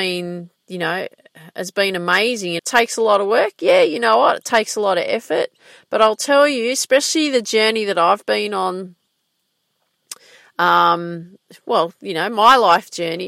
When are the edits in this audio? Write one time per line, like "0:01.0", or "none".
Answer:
0:02.6

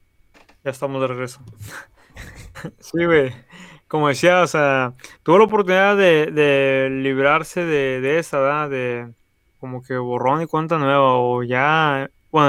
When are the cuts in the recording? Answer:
0:09.6

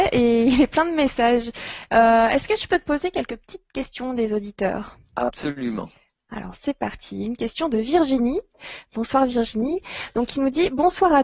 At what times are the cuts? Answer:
none

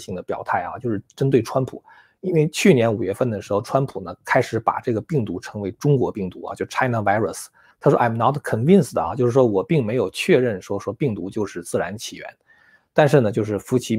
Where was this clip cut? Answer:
0:07.7
0:12.8

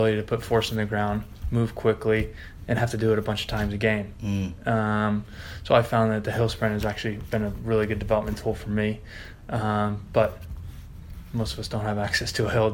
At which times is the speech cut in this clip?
none

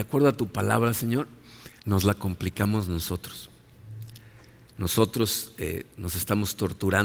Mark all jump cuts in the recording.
0:01.8

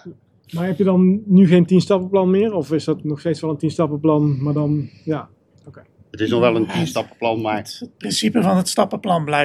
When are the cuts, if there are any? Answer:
none

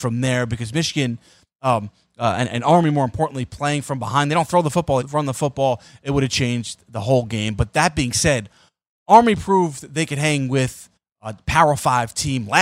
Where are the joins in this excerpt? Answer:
0:05.0

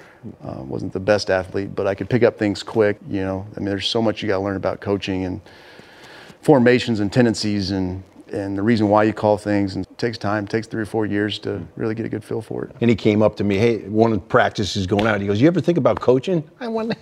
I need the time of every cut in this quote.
0:03.0
0:09.8
0:12.8

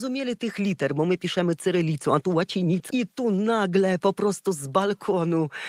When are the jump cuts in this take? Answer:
0:02.9

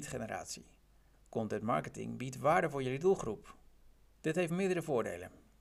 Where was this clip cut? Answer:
0:01.1
0:04.1

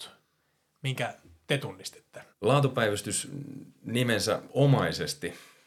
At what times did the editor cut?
0:02.3

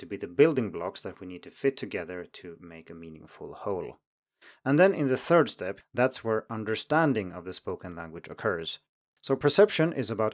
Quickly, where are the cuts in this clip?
0:05.8
0:09.2

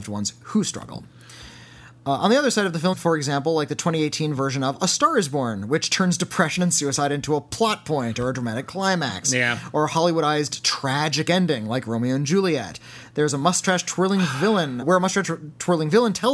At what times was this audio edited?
0:02.9
0:14.8

